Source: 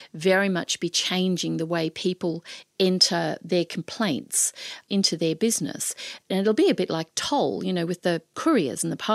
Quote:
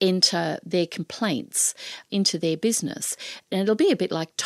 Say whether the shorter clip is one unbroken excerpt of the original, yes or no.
yes